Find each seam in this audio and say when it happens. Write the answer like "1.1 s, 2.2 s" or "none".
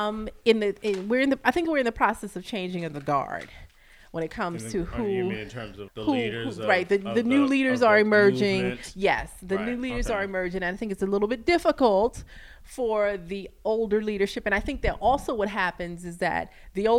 5.9 s